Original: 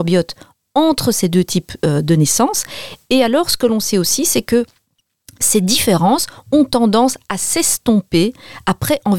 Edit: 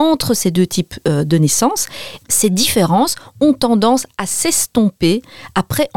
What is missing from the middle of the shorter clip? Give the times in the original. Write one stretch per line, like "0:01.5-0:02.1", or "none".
0:03.0-0:05.3